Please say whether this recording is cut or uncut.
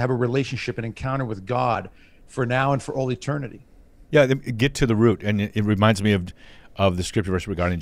cut